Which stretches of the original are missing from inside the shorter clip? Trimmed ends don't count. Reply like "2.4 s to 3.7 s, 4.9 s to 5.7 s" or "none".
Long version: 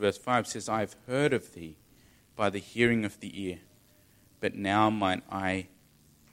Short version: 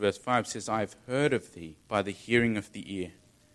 1.8 s to 2.3 s